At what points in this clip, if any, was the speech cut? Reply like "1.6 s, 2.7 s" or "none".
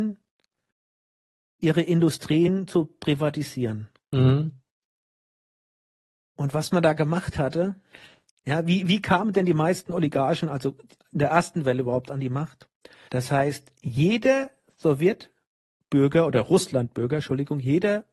13.1 s